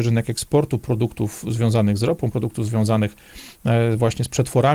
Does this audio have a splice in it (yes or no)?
no